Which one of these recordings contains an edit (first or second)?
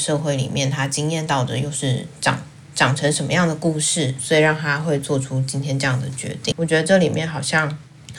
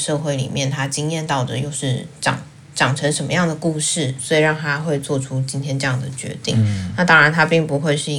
first